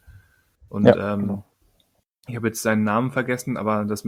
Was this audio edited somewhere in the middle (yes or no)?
no